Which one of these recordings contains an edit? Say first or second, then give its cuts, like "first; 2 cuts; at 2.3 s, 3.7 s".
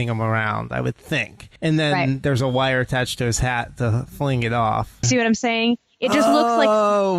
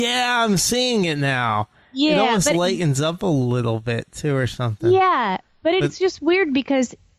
first; 2 cuts; at 1.6 s, 5.0 s